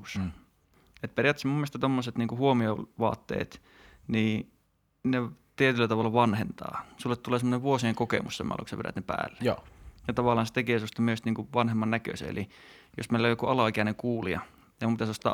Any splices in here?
no; 0 cuts

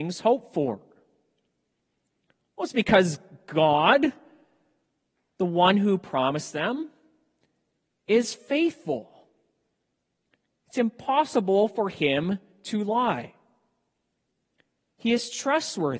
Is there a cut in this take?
no; 0 cuts

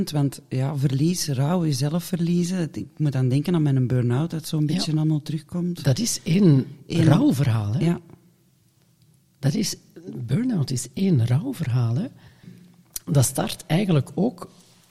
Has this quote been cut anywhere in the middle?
no; 0 cuts

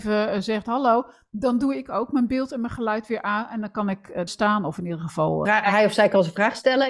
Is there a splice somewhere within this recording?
yes; 2 cuts; at 4.3 s, 5.4 s

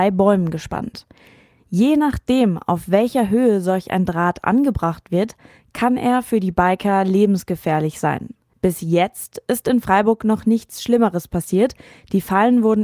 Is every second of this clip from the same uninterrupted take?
yes; 0 cuts

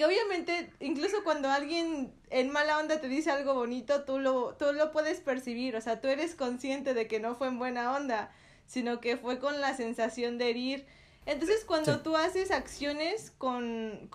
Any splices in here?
no; 0 cuts

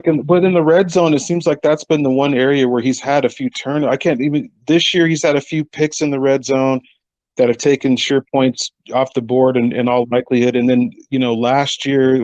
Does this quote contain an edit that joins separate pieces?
no; 0 cuts

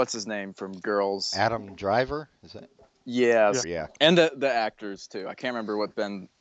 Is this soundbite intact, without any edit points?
no; 1 cut; at 3.6 s

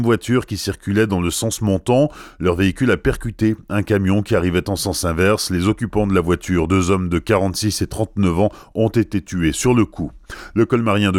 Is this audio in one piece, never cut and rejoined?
yes; 0 cuts

